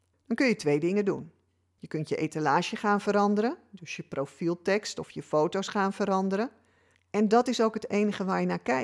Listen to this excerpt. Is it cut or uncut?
cut